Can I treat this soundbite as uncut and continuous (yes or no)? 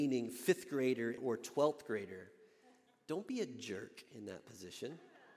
no